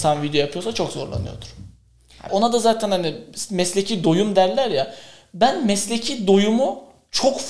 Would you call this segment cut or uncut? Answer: cut